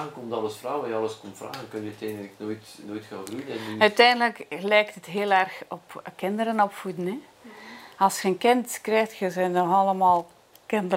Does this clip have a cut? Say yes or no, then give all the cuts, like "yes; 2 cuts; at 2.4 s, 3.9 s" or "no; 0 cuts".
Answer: no; 0 cuts